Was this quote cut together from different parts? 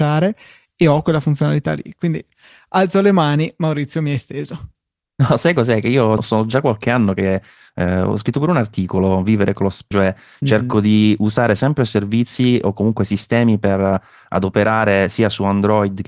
yes; 2 cuts; at 6.2 s, 9.9 s

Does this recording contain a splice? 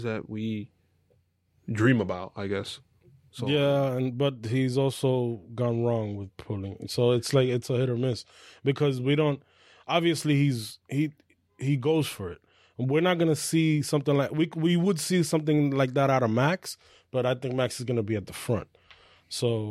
no; 0 cuts

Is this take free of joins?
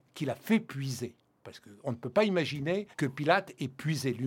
no; 1 cut; at 2.9 s

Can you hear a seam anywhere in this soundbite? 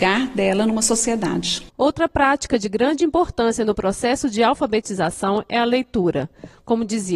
yes; 1 cut; at 1.7 s

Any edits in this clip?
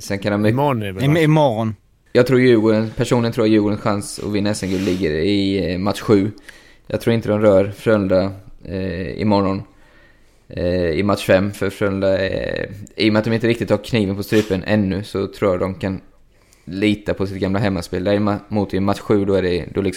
no; 0 cuts

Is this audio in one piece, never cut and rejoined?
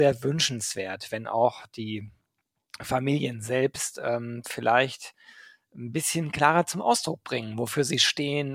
yes; 0 cuts

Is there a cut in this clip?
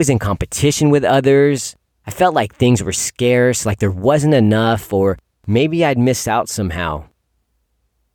no; 0 cuts

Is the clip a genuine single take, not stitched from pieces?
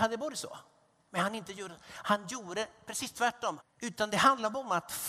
no; 1 cut; at 3.6 s

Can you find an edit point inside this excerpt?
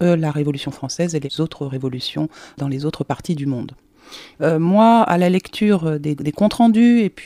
yes; 2 cuts; at 4.3 s, 6.2 s

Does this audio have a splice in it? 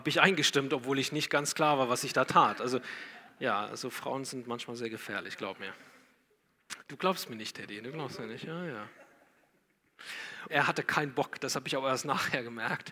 yes; 2 cuts; at 6.8 s, 10.5 s

